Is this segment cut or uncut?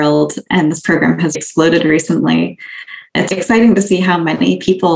cut